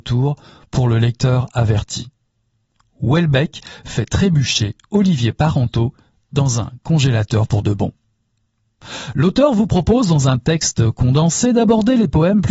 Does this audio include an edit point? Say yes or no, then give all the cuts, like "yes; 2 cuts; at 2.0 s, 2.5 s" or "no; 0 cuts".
no; 0 cuts